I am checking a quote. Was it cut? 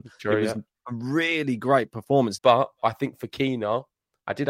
yes; 1 cut; at 2.4 s

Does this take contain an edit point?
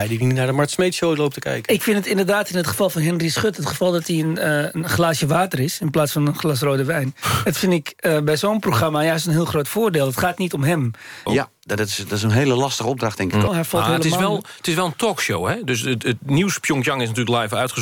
yes; 2 cuts; at 11.3 s, 13.5 s

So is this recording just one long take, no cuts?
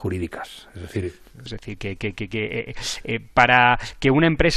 no; 1 cut; at 1.5 s

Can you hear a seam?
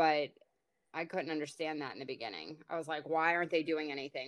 no; 0 cuts

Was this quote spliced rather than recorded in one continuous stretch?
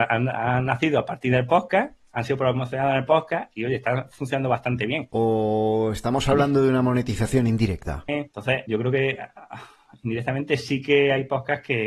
yes; 2 cuts; at 5.1 s, 8.1 s

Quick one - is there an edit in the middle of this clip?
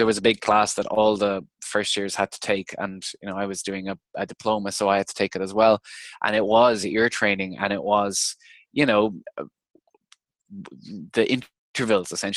no; 0 cuts

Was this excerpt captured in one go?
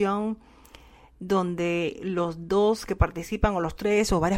yes; 0 cuts

